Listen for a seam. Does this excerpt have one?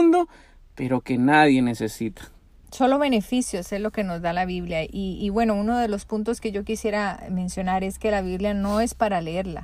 yes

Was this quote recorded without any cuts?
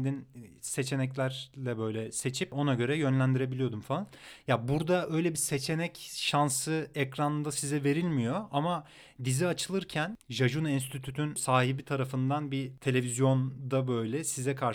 yes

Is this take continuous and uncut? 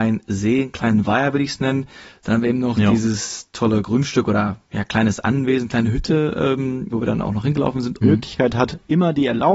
no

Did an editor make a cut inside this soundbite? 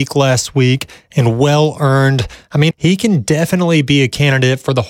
yes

